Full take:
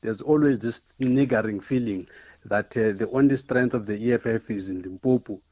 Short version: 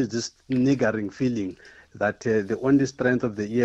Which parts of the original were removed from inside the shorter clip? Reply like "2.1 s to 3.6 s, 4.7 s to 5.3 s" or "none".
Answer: none